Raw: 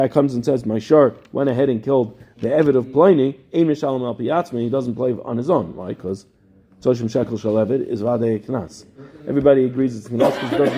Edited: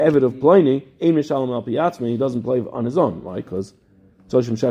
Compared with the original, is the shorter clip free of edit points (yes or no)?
yes